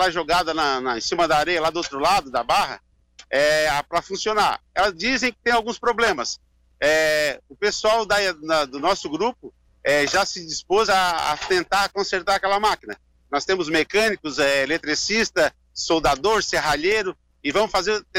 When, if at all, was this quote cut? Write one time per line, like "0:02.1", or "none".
none